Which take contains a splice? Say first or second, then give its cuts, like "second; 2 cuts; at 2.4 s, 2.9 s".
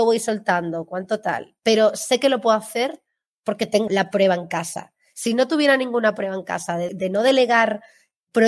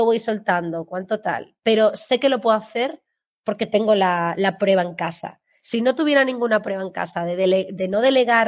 first; 2 cuts; at 3.9 s, 6.9 s